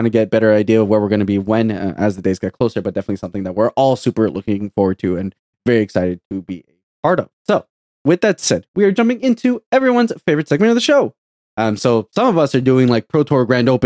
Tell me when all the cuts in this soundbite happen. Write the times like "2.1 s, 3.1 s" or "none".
7.4 s, 11.4 s